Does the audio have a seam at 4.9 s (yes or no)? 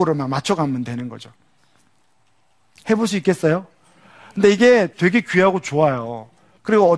yes